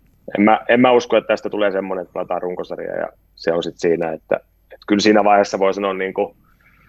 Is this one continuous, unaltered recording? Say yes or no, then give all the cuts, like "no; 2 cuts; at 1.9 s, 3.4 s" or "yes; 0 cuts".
yes; 0 cuts